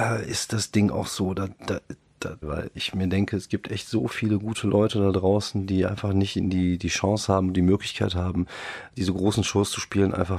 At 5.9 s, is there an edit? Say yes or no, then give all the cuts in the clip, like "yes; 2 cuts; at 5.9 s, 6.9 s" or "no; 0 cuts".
no; 1 cut; at 2.4 s